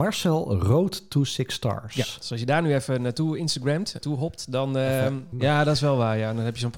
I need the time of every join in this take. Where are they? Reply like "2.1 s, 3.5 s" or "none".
4.0 s, 5.3 s

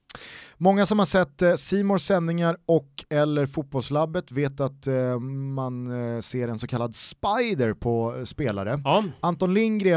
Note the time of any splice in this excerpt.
none

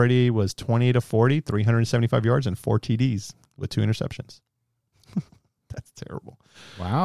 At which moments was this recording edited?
none

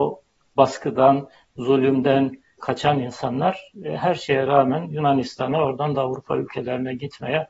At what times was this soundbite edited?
2.6 s

